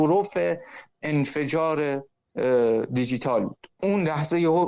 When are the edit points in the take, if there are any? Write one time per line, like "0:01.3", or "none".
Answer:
0:03.7